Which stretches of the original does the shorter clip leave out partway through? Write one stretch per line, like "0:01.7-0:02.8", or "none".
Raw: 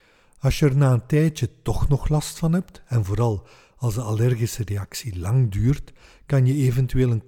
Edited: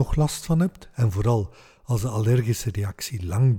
none